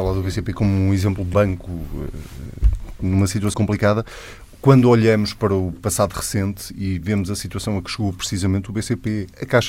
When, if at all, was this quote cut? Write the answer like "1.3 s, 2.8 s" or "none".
1.3 s, 3.5 s

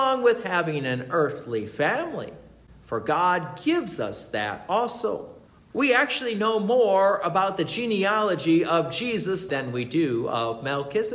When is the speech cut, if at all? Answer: 5.7 s, 9.5 s

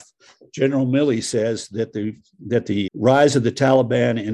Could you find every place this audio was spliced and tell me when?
2.9 s

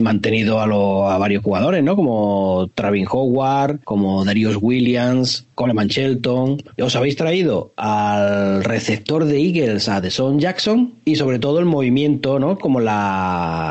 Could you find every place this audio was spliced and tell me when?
12.6 s

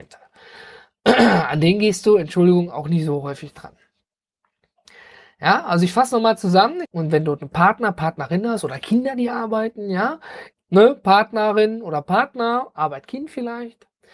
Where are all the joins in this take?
6.8 s, 10.5 s

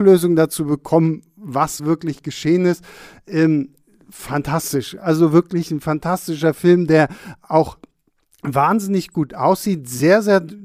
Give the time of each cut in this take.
none

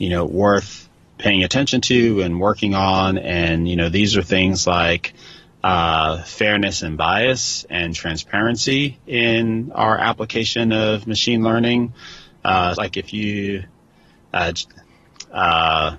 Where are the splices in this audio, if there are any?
12.7 s

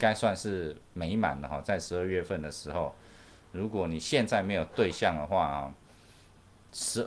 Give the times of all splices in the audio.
none

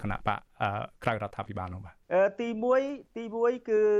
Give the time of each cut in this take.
2.0 s

